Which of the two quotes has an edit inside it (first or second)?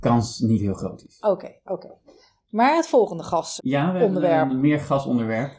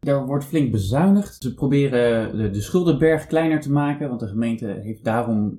first